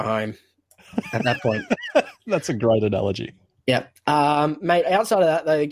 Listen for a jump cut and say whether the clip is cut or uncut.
uncut